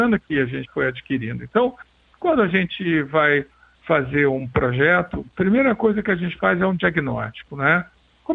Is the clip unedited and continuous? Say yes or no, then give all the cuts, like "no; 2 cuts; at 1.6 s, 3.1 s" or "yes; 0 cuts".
yes; 0 cuts